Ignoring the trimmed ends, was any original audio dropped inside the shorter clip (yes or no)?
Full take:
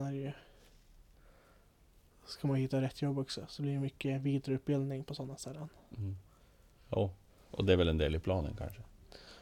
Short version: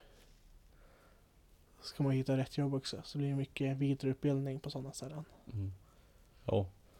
no